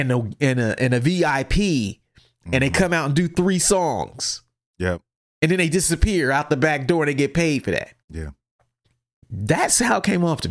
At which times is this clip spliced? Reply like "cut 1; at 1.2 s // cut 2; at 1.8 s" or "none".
cut 1; at 8.0 s